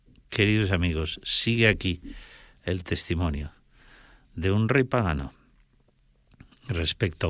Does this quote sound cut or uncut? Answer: uncut